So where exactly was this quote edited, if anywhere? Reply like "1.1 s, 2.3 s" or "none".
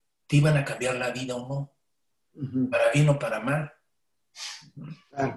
none